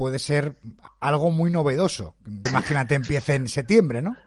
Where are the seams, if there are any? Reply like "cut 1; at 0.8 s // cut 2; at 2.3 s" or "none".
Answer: cut 1; at 2.5 s